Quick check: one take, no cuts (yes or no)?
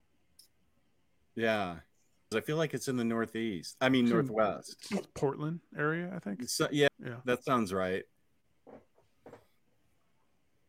no